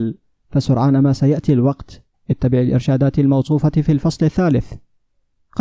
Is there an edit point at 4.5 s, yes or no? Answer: no